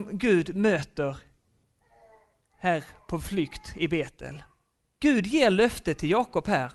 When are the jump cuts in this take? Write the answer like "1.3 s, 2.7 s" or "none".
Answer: 5.0 s